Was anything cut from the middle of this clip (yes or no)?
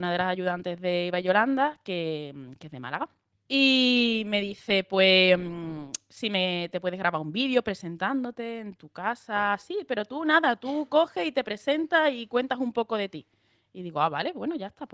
yes